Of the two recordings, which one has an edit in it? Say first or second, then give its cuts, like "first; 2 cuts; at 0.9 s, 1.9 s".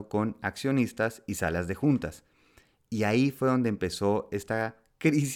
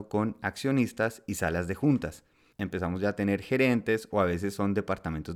second; 1 cut; at 2.5 s